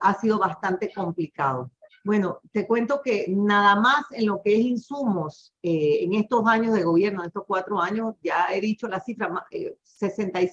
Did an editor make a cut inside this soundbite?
yes; 1 cut; at 1.9 s

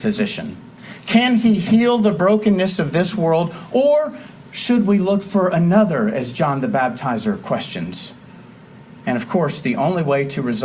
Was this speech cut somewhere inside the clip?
no; 0 cuts

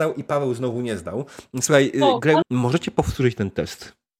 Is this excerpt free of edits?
no; 1 cut; at 2.4 s

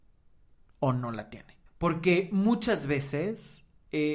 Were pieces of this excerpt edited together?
yes; 1 cut; at 1.7 s

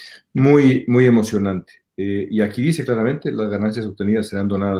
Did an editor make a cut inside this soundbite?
no; 0 cuts

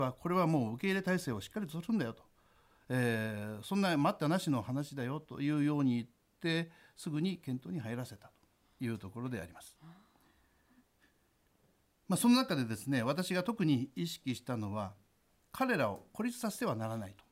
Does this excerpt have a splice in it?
no; 0 cuts

